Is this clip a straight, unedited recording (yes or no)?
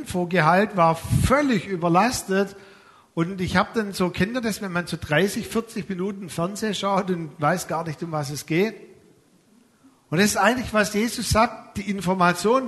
yes